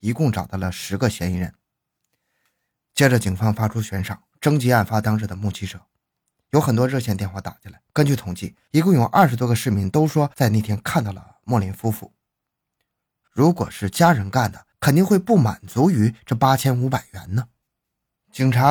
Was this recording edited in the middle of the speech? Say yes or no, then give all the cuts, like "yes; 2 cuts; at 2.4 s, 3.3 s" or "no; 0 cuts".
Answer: yes; 2 cuts; at 7.9 s, 13.2 s